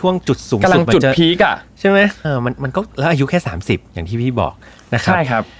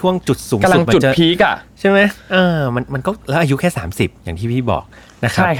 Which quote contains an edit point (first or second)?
first